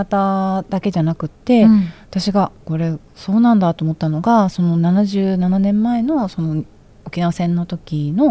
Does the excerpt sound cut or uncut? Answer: cut